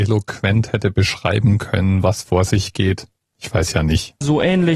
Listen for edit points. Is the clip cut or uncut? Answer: uncut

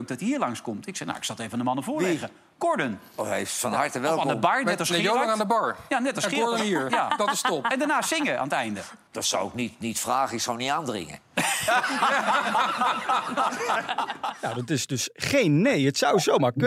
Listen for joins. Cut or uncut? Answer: uncut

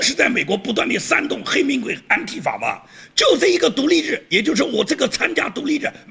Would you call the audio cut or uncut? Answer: uncut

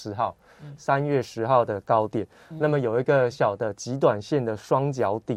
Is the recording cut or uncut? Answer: cut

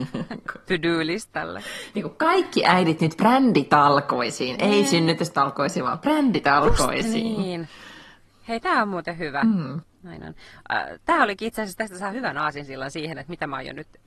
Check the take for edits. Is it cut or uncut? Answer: cut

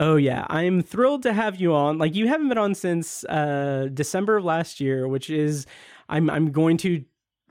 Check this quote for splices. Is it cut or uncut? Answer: uncut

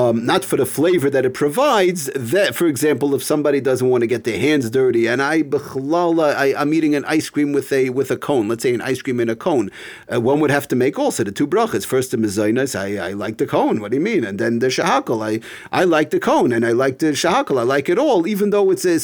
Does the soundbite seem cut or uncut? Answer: uncut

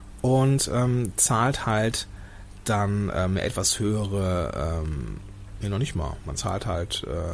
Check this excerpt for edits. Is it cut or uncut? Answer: uncut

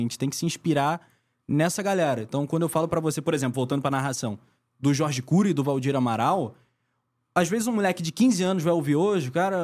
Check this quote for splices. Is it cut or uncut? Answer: uncut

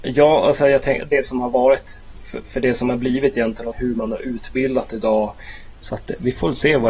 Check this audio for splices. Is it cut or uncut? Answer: cut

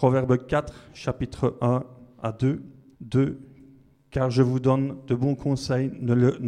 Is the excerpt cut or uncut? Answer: cut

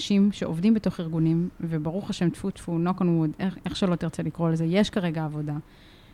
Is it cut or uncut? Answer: uncut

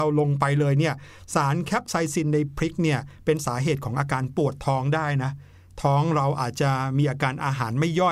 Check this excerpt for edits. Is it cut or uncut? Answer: uncut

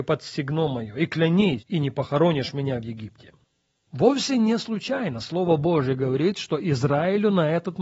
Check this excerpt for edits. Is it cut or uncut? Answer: cut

